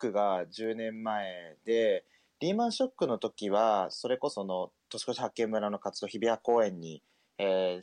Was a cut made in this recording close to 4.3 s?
yes; 1 cut; at 4.3 s

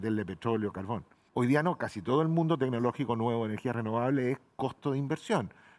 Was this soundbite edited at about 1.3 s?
yes; 1 cut; at 1.3 s

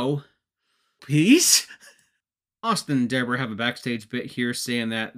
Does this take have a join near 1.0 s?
yes; 1 cut; at 1.0 s

